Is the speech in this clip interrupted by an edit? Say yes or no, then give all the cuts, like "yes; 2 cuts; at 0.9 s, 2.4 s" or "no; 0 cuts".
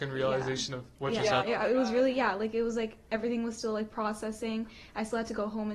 yes; 1 cut; at 1.4 s